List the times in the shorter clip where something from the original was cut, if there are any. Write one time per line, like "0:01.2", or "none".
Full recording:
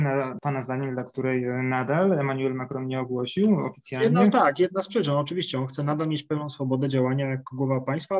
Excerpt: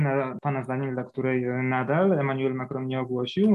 none